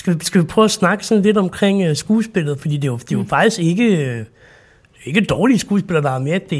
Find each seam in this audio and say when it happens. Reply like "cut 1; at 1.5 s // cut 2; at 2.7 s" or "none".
none